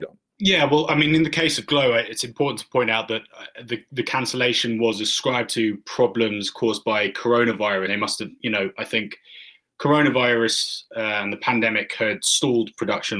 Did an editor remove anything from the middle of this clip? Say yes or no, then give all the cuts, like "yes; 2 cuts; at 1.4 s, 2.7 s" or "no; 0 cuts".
yes; 1 cut; at 7.9 s